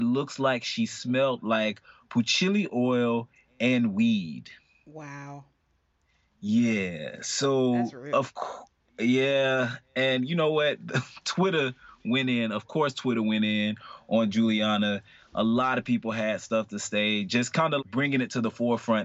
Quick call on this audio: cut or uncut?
cut